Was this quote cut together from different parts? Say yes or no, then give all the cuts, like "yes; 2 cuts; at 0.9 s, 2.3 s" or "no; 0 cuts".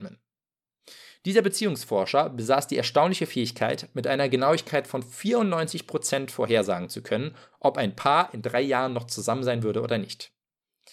no; 0 cuts